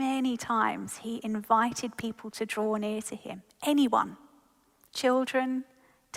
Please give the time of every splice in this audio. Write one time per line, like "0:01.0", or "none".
none